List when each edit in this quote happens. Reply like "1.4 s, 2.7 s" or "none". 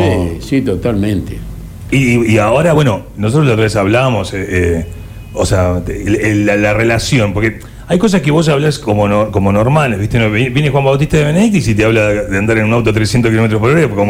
none